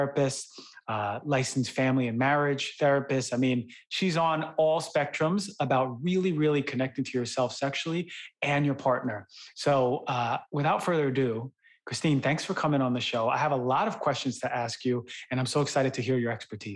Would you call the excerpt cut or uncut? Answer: uncut